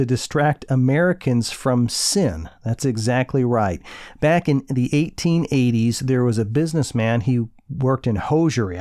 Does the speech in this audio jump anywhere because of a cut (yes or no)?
no